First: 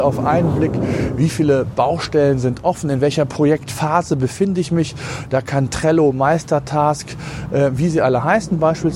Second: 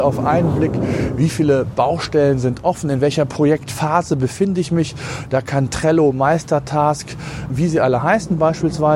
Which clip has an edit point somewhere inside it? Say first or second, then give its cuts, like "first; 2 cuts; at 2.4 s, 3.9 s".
second; 1 cut; at 7.5 s